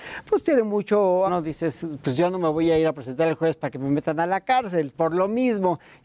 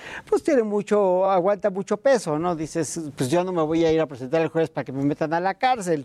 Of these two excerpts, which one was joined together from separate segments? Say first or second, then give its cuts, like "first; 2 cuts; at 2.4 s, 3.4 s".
first; 2 cuts; at 1.3 s, 4.9 s